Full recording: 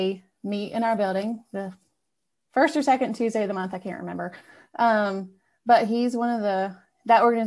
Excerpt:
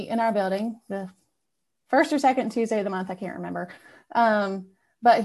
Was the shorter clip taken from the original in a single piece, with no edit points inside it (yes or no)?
yes